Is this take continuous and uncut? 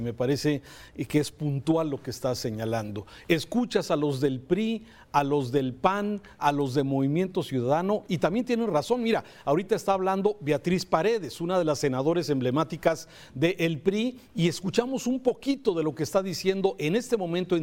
no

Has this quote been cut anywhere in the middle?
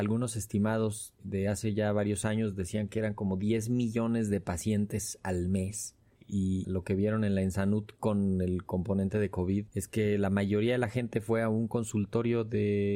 yes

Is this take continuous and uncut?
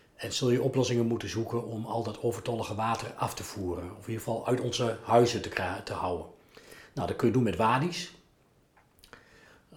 yes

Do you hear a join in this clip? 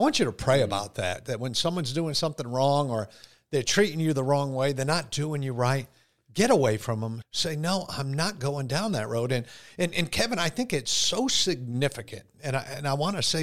yes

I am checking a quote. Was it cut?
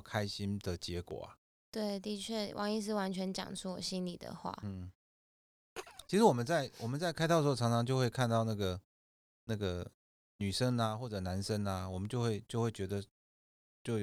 no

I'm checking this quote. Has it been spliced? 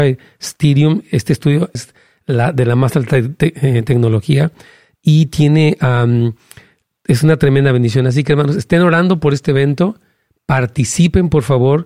yes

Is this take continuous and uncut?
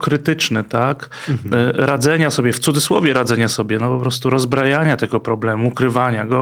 yes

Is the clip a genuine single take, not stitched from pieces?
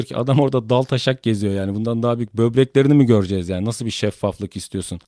yes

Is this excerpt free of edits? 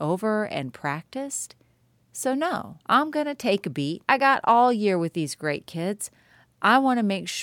no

